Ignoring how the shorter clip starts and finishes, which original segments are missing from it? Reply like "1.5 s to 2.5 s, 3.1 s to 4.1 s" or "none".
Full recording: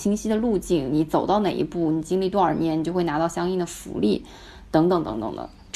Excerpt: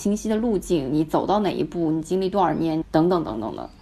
2.8 s to 4.6 s